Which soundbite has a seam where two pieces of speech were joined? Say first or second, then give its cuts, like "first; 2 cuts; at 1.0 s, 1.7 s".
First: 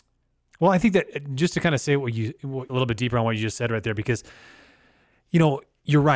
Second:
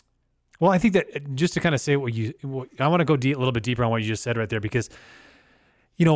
first; 1 cut; at 2.7 s